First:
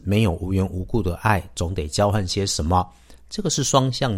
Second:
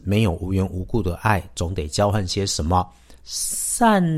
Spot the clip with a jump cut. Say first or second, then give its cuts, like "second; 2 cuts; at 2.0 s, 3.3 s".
second; 1 cut; at 3.2 s